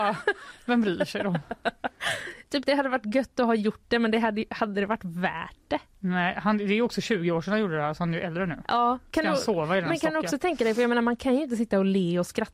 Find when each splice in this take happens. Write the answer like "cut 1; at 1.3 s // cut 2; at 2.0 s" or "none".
none